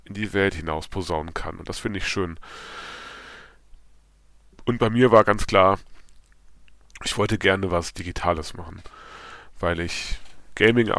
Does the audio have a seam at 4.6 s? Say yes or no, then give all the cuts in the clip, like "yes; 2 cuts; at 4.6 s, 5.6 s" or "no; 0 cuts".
yes; 1 cut; at 4.6 s